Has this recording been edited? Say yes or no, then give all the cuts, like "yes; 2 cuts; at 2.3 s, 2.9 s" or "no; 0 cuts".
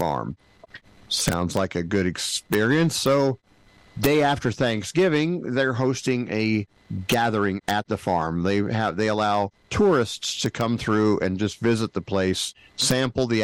no; 0 cuts